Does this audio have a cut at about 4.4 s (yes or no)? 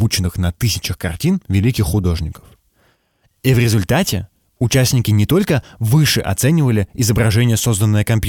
no